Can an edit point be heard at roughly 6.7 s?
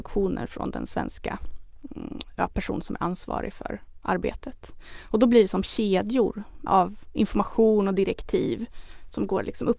yes; 1 cut; at 6.7 s

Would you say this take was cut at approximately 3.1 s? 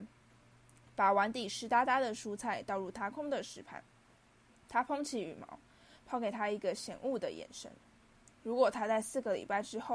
yes; 2 cuts; at 3.1 s, 8.3 s

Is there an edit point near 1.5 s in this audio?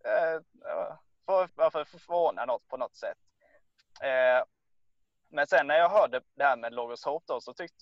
yes; 1 cut; at 1.5 s

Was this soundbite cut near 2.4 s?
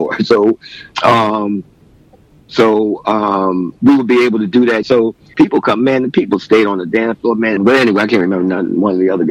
no; 2 cuts; at 4.8 s, 7.6 s

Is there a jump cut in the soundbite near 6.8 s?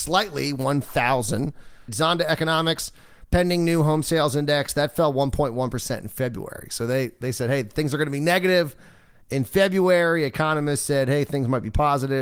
no; 1 cut; at 1.9 s

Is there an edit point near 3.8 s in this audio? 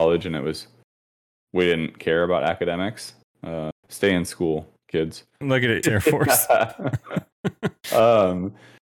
yes; 2 cuts; at 3.8 s, 5.8 s

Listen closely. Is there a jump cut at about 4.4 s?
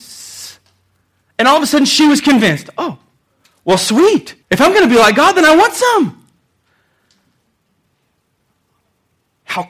yes; 1 cut; at 4.4 s

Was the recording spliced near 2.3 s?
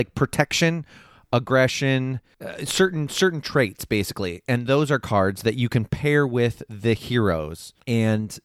yes; 1 cut; at 2.3 s

